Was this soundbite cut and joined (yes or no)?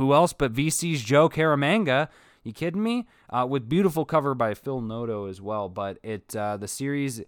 no